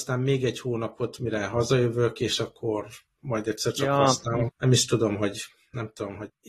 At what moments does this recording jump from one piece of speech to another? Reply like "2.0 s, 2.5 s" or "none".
4.5 s

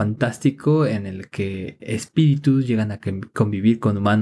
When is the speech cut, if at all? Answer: 1.8 s

